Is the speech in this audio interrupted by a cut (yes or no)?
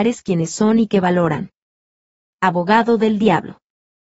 no